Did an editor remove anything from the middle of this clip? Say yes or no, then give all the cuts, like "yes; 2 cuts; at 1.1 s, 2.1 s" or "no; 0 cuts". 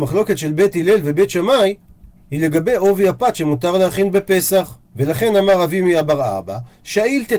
yes; 1 cut; at 4.9 s